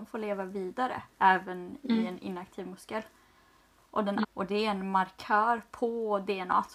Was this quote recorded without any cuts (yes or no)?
no